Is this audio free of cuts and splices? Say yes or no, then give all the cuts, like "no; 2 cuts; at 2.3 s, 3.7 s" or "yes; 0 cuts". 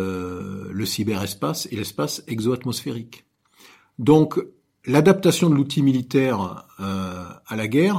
yes; 0 cuts